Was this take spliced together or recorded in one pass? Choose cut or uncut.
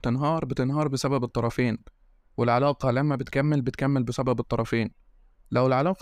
uncut